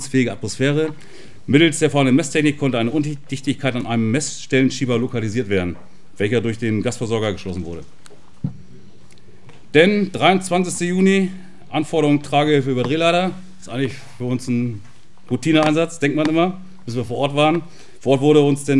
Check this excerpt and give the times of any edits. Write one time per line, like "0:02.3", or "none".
none